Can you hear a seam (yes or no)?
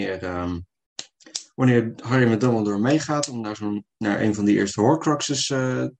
no